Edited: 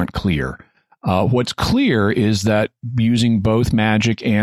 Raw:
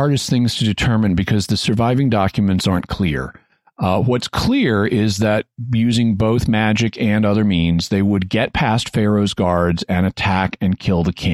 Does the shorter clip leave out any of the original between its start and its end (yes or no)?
no